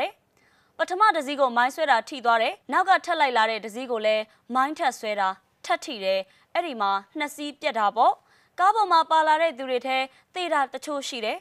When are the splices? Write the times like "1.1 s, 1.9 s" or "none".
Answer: 2.6 s

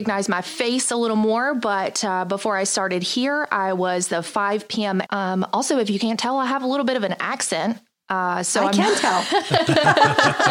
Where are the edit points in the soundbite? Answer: 5.1 s

